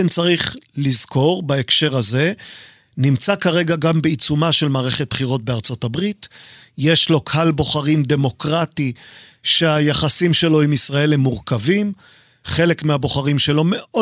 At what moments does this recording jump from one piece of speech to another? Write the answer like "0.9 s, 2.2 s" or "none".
none